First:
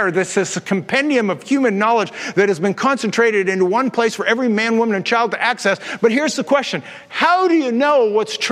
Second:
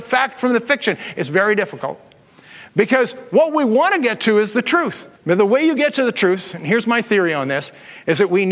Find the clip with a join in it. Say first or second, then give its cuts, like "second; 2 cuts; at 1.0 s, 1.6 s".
second; 1 cut; at 5.2 s